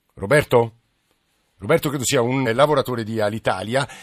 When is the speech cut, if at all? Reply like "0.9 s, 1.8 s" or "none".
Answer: 2.4 s